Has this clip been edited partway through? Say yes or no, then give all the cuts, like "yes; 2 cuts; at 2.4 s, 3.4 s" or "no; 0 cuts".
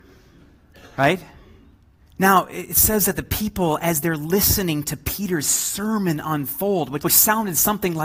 yes; 2 cuts; at 2.0 s, 7.0 s